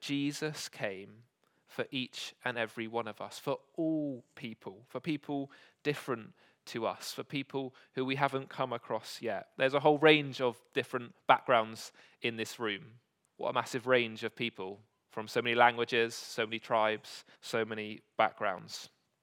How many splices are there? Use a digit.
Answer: 2